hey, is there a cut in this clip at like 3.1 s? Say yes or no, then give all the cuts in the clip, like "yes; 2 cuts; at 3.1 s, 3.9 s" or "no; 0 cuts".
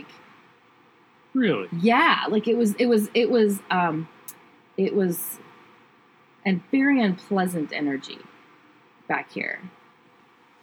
no; 0 cuts